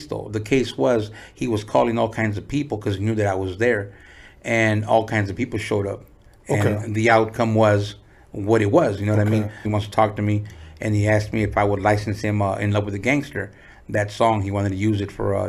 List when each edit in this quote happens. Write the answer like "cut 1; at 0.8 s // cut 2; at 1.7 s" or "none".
cut 1; at 9.6 s